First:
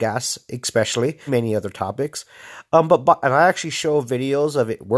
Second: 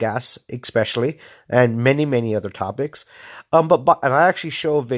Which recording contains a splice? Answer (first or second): first